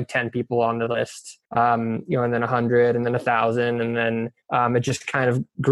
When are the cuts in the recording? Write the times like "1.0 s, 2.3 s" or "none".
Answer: 1.5 s, 4.4 s